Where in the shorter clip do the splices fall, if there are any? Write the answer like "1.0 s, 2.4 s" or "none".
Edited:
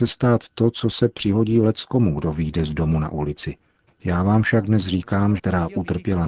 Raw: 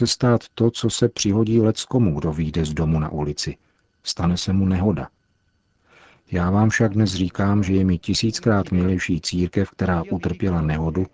3.9 s, 5.4 s